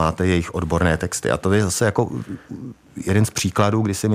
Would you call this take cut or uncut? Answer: uncut